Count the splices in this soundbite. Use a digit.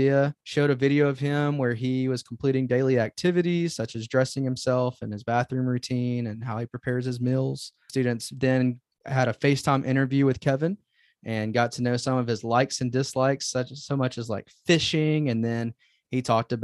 0